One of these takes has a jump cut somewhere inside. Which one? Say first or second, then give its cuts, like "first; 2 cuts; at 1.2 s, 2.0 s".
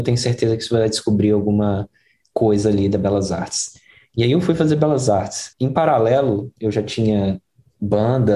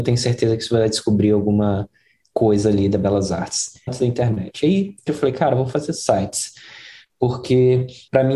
second; 2 cuts; at 3.9 s, 5.1 s